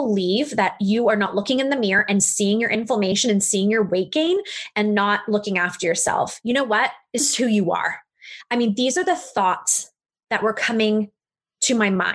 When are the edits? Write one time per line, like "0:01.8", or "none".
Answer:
0:07.2